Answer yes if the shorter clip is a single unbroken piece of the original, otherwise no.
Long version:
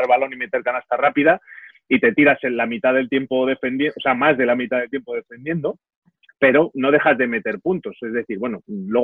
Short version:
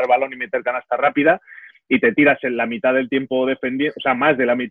yes